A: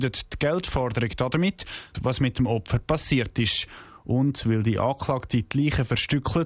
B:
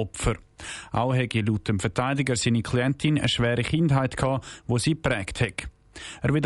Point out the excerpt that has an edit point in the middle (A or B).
A